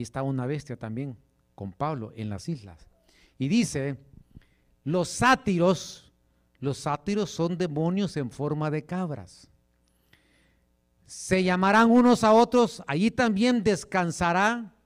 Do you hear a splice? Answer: no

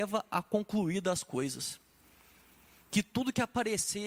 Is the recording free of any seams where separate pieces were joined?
yes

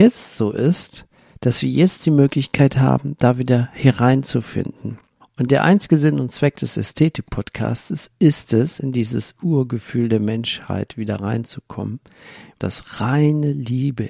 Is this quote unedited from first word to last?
no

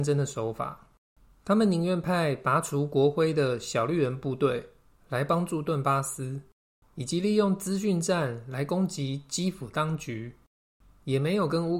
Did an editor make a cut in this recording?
no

